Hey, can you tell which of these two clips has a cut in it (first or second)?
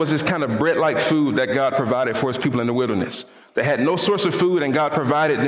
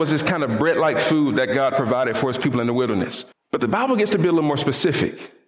second